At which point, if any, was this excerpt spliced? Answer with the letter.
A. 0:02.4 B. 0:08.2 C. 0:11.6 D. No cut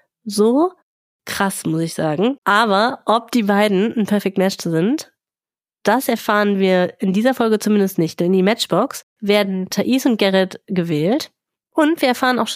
A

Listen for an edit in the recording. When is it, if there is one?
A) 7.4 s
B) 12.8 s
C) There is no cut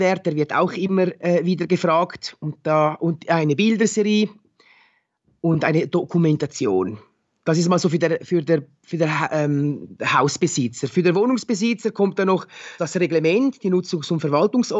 B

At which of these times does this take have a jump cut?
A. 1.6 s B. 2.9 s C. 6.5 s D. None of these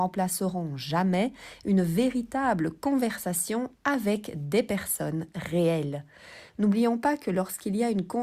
C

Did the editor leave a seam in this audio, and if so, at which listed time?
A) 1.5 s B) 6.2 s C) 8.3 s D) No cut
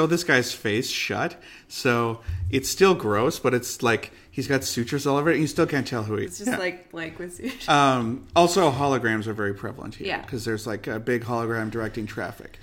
B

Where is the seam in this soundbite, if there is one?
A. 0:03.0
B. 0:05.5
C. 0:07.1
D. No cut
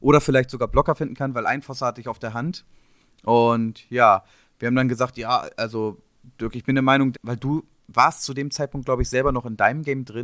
C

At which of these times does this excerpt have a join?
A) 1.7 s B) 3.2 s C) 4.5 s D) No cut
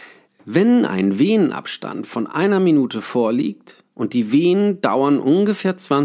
D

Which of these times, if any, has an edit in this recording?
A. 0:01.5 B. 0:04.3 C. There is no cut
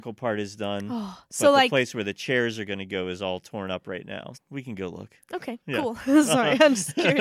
B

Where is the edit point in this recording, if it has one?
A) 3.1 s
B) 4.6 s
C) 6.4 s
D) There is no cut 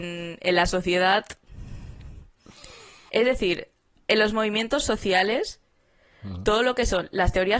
A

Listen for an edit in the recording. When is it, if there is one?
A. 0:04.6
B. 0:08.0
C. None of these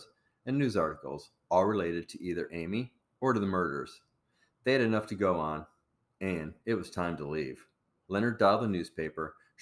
B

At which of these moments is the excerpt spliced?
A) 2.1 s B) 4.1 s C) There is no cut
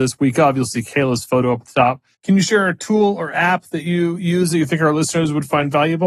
A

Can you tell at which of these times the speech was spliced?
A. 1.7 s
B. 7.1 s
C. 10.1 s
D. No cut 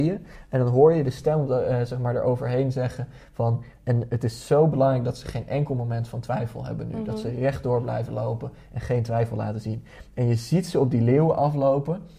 D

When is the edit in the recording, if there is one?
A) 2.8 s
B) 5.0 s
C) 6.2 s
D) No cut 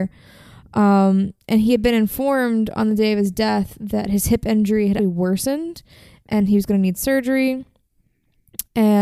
B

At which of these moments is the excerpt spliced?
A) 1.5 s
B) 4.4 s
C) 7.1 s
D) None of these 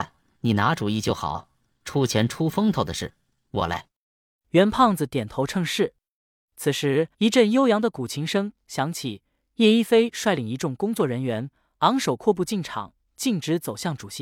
C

